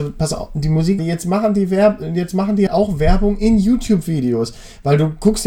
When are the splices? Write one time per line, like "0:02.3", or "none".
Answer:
0:01.0
0:02.7